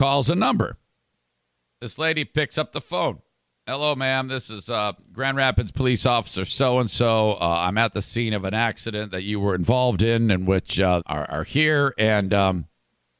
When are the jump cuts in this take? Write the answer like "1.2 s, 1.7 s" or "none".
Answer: 11.0 s